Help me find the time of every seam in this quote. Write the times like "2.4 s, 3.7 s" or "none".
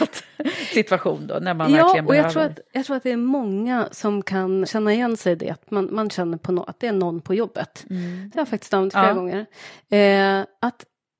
4.6 s, 8.3 s